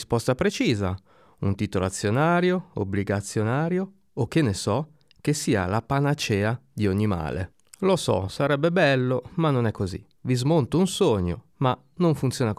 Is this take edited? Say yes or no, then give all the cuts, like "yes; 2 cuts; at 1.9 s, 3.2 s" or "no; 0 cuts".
yes; 2 cuts; at 10.1 s, 11.5 s